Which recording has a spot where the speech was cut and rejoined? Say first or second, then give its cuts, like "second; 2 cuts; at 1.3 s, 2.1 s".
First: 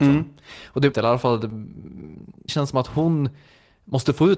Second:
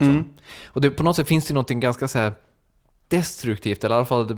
first; 2 cuts; at 0.9 s, 2.5 s